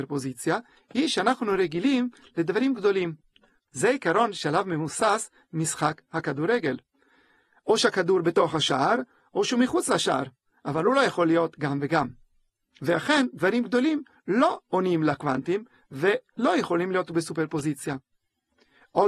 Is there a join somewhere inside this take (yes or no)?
yes